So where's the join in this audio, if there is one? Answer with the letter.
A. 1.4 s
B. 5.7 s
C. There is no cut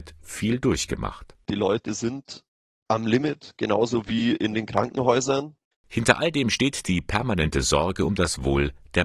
B